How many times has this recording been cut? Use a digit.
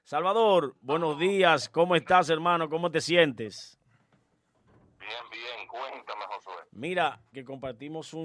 1